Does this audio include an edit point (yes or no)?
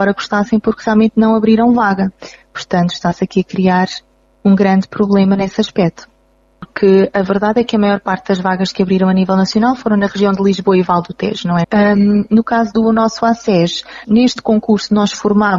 yes